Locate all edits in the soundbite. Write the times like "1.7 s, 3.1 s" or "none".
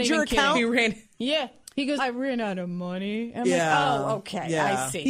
2.0 s